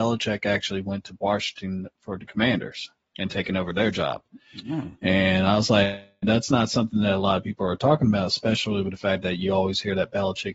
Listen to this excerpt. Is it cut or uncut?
uncut